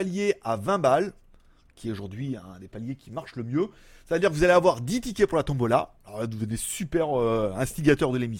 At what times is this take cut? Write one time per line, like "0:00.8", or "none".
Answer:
none